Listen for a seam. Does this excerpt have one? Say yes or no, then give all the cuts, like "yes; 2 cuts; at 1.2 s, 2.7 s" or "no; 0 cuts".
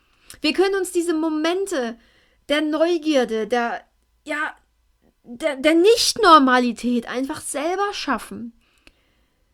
no; 0 cuts